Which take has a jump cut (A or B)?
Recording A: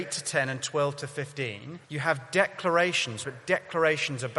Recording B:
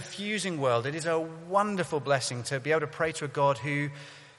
A